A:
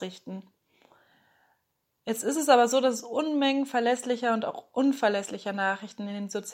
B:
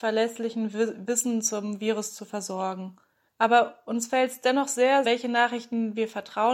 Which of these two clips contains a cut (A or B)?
B